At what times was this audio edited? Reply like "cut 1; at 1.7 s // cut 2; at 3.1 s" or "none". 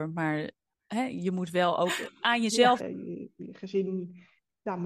cut 1; at 2.8 s